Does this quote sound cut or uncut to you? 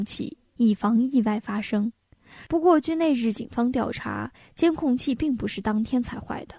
cut